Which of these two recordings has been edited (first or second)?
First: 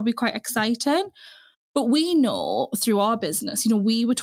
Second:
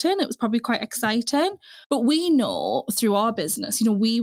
second